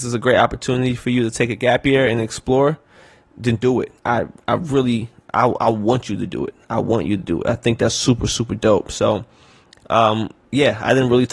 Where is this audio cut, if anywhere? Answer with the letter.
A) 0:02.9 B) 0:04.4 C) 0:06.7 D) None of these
D